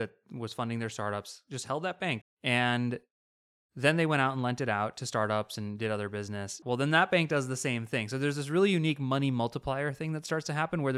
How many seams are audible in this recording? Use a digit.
2